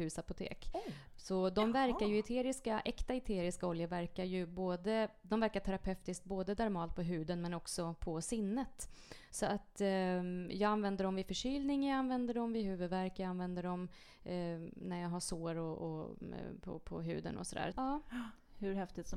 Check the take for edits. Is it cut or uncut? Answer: cut